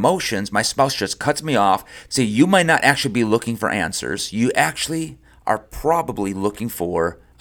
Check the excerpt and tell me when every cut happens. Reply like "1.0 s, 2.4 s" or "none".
2.1 s